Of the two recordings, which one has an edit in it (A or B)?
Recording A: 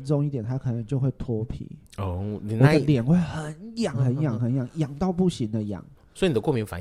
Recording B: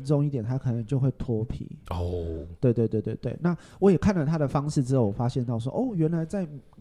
A